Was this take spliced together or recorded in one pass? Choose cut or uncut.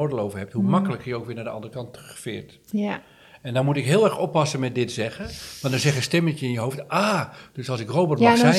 uncut